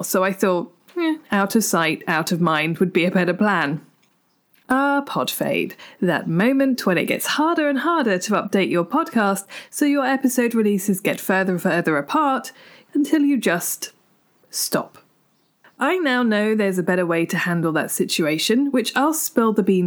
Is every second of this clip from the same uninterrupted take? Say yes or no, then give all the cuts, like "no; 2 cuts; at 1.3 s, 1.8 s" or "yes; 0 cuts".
yes; 0 cuts